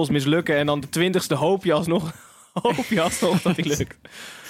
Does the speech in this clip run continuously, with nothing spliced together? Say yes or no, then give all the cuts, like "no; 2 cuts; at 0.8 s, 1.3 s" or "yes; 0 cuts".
yes; 0 cuts